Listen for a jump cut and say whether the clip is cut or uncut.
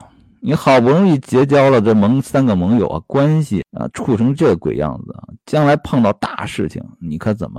cut